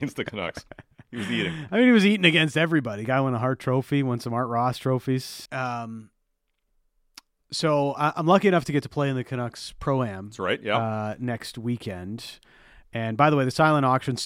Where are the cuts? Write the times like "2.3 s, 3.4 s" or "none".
5.5 s

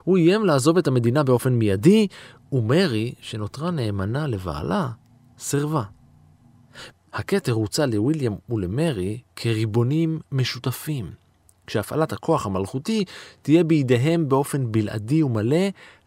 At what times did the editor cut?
6.9 s

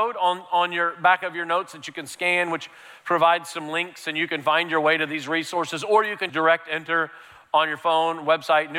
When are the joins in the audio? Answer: 6.3 s

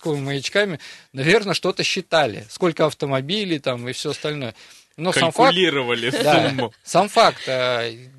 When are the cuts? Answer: none

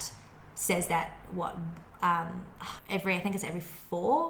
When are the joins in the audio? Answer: 2.8 s

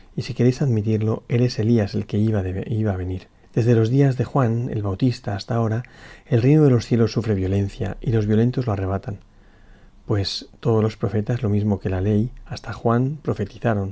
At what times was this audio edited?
3.4 s

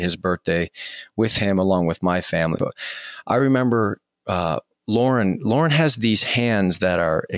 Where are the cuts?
2.6 s

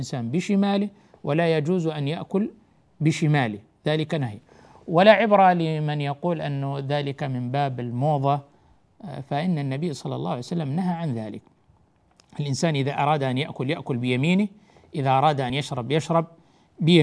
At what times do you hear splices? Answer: none

